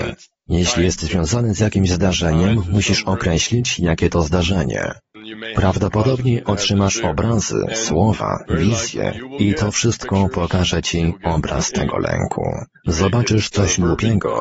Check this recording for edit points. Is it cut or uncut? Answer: cut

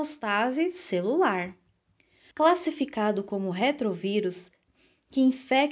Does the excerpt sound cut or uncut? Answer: cut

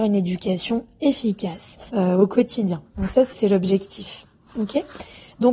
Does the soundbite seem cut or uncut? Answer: cut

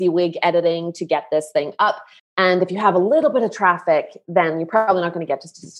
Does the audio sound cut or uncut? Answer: cut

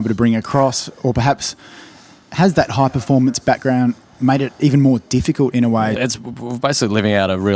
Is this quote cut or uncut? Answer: cut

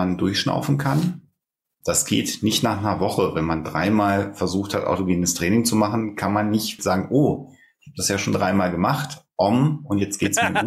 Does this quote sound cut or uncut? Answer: cut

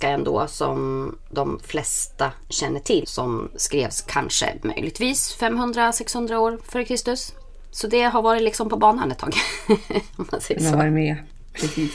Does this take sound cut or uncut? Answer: cut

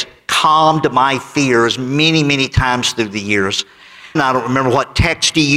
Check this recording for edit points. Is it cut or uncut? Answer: cut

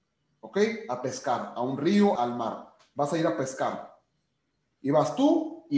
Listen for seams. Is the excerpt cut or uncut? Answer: cut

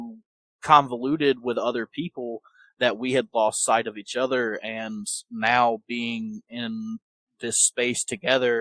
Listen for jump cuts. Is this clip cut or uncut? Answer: uncut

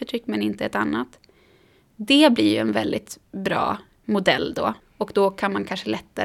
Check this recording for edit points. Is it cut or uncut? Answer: cut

